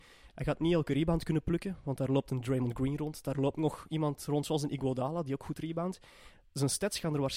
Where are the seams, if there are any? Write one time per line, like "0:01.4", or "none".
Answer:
none